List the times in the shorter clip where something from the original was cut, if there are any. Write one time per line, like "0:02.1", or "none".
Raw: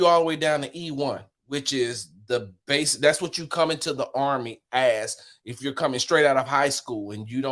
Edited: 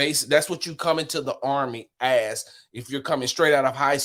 none